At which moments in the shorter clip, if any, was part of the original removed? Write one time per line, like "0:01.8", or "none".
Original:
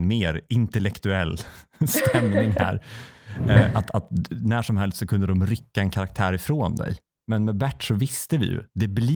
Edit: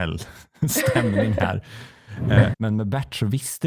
0:02.5